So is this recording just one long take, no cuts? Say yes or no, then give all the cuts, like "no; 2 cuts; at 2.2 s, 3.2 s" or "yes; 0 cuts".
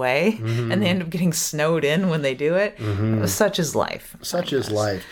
yes; 0 cuts